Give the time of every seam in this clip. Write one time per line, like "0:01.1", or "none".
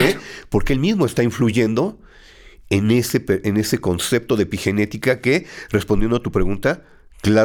none